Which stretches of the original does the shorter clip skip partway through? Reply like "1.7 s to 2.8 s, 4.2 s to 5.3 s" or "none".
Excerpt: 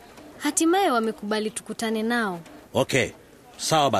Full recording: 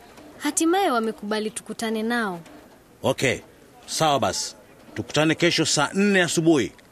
2.6 s to 2.9 s